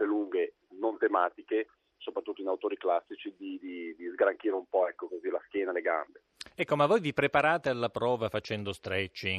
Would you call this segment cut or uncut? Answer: uncut